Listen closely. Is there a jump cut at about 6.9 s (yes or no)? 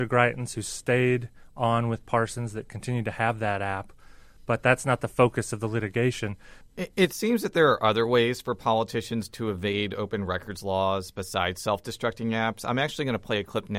no